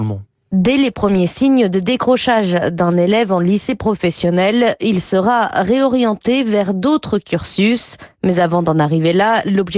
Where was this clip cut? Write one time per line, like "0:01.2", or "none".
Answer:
none